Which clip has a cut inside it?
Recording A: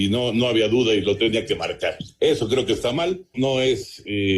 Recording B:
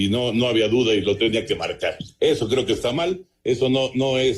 A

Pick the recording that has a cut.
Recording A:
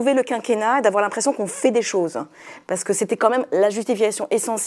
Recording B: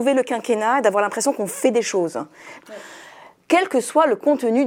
B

